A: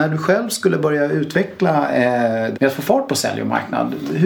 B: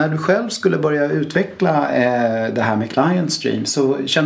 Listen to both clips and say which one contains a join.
A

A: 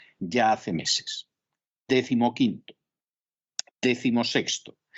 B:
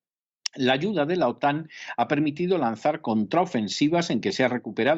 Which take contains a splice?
A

